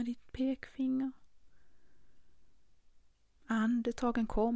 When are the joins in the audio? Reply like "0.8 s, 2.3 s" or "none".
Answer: 3.3 s